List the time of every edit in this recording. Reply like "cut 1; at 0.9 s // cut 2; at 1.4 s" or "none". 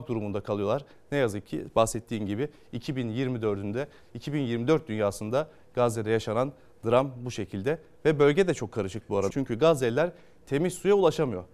cut 1; at 9.3 s